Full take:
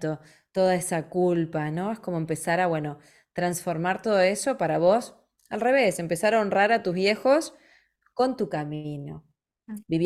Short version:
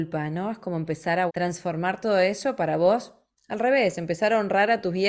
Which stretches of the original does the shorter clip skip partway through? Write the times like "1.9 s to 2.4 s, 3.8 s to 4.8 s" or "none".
2.7 s to 3.3 s